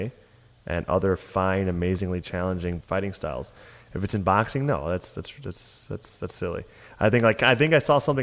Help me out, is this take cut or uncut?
cut